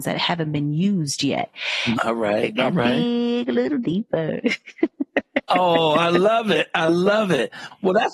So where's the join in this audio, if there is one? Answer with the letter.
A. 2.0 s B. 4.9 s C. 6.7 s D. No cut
A